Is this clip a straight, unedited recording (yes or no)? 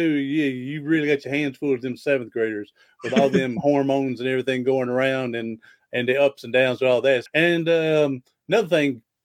no